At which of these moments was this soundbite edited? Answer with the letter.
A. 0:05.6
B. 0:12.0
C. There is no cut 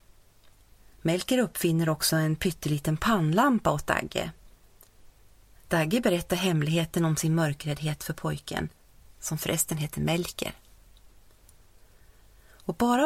A